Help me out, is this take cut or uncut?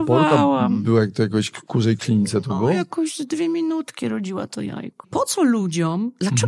cut